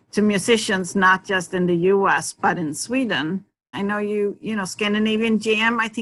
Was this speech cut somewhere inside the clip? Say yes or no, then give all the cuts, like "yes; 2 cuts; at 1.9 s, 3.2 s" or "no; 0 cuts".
yes; 1 cut; at 3.7 s